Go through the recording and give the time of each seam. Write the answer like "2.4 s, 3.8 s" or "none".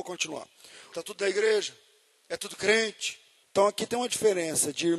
0.9 s, 3.4 s